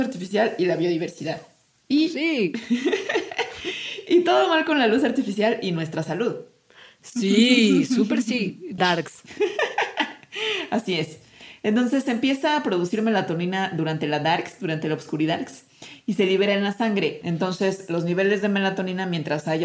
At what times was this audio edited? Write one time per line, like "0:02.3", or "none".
0:08.8
0:17.2